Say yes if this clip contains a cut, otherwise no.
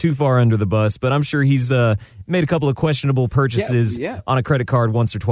no